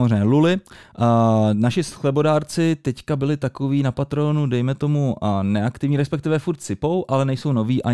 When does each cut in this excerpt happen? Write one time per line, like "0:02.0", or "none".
none